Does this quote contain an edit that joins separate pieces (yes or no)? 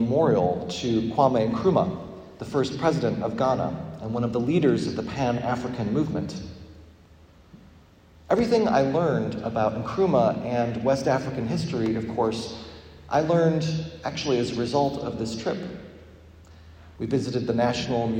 yes